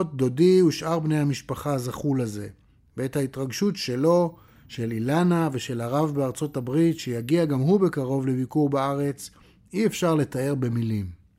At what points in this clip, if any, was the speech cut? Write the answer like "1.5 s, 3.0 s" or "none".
none

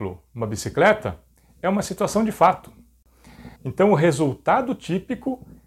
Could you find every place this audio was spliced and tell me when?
3.6 s

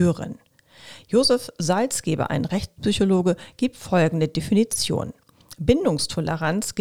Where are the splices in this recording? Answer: none

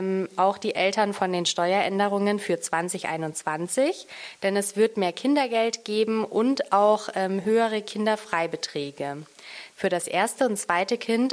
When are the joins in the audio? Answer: 9.7 s

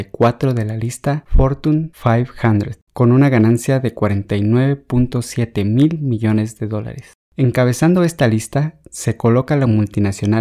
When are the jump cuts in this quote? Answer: 2.9 s

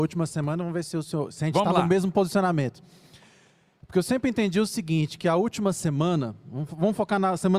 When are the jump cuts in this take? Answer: none

